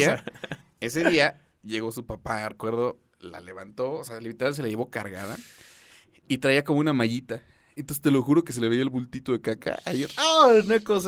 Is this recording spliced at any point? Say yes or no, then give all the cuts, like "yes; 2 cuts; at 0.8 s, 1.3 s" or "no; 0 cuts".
no; 0 cuts